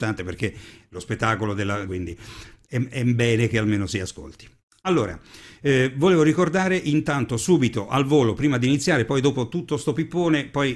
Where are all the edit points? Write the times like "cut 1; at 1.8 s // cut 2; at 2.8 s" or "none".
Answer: cut 1; at 1.9 s